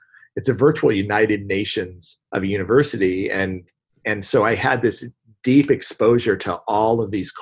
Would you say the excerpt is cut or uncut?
cut